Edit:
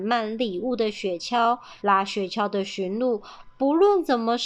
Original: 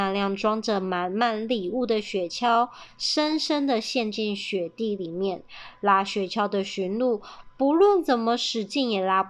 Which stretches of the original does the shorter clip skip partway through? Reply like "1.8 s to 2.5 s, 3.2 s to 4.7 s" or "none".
2.9 s to 5.8 s

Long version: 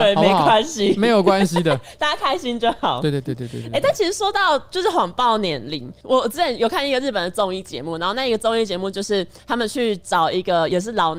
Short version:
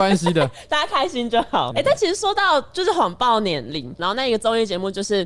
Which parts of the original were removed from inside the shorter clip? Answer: 3.0 s to 3.7 s, 6.0 s to 8.0 s

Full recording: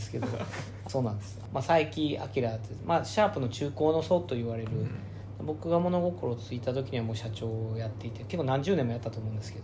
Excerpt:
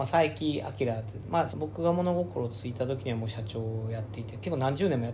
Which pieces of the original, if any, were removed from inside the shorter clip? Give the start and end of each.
3.1 s to 5.4 s

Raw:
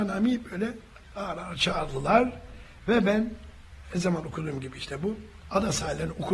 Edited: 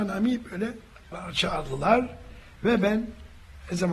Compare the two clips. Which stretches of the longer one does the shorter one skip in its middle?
1.1 s to 1.4 s

